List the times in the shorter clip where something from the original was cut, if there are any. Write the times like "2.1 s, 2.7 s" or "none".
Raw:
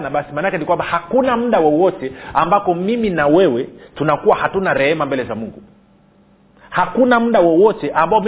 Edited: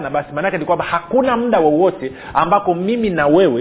none